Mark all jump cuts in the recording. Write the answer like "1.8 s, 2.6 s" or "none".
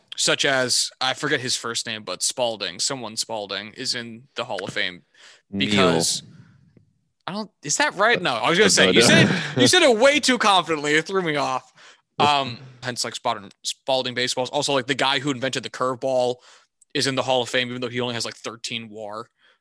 12.8 s